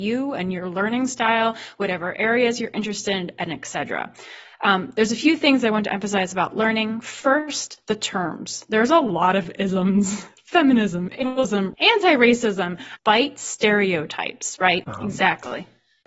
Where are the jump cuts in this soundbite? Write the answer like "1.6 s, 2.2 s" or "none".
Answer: 11.7 s, 13.0 s, 14.8 s